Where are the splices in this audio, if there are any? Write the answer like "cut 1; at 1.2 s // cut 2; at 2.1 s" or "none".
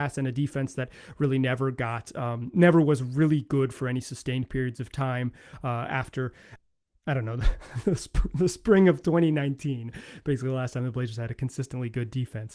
none